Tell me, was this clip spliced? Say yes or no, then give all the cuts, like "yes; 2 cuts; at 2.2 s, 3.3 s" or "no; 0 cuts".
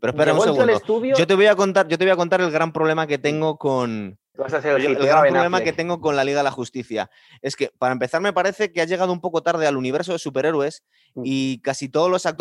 yes; 1 cut; at 4.3 s